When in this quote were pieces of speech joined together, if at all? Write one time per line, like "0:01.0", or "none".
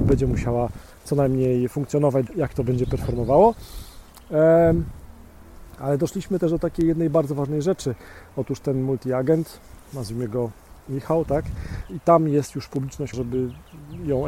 0:02.3
0:11.9
0:13.1